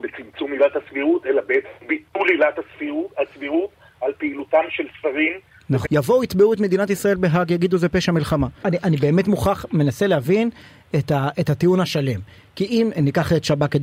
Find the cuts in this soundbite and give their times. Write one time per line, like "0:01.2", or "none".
0:05.8
0:08.6